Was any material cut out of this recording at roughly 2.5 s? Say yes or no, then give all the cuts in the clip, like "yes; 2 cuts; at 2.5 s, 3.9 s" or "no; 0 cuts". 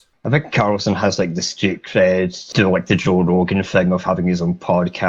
yes; 1 cut; at 2.5 s